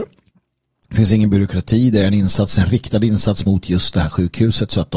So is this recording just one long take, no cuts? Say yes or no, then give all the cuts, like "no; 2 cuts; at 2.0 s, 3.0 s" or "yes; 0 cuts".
yes; 0 cuts